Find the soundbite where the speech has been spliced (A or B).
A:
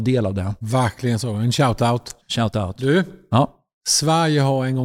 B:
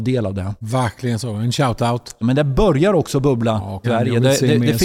B